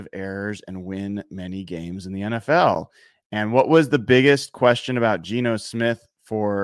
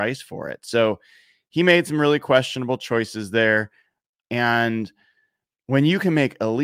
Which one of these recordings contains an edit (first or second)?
second